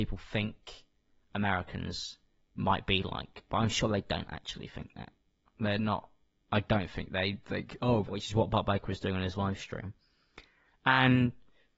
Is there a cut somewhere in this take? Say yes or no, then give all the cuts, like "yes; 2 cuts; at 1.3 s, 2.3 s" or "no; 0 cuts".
yes; 1 cut; at 8.1 s